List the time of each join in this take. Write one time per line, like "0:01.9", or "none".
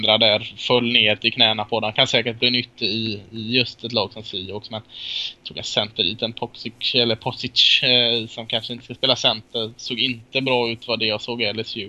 none